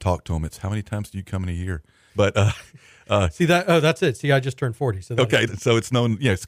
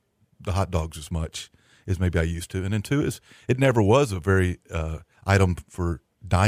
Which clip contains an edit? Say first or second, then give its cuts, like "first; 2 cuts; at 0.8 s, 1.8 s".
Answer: first; 2 cuts; at 2.1 s, 5.5 s